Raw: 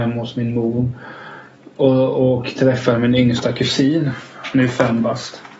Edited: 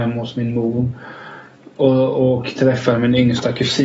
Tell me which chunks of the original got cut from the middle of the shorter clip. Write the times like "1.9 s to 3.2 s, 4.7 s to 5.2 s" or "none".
none